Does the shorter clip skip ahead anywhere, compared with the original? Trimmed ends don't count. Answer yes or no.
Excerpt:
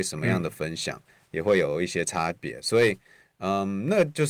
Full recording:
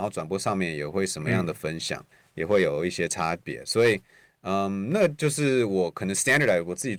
no